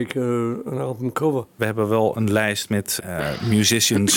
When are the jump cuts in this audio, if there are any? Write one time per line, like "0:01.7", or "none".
0:01.6
0:03.0